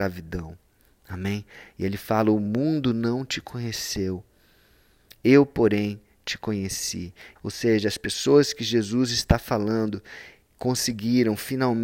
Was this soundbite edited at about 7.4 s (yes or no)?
yes